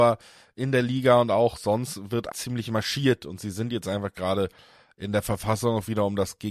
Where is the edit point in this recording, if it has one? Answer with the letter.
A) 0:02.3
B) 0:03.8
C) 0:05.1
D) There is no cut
A